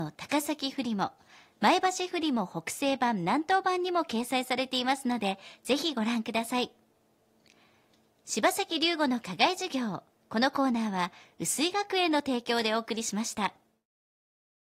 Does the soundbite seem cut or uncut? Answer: uncut